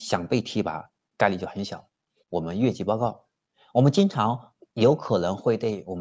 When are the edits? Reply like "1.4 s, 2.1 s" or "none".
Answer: 2.2 s